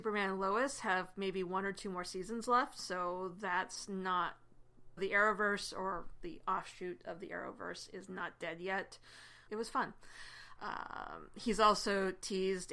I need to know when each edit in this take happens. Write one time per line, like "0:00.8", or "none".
0:05.0
0:09.5
0:10.6